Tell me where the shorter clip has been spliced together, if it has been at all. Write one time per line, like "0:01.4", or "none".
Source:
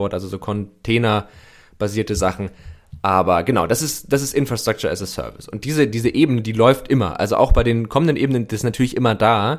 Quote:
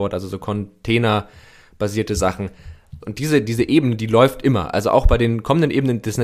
0:03.0

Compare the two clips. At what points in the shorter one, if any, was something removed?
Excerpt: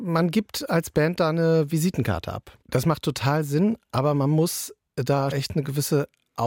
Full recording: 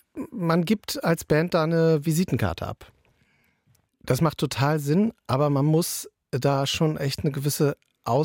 0:02.6
0:05.3

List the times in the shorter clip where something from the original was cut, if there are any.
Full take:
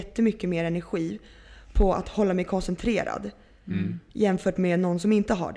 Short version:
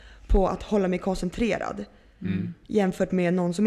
none

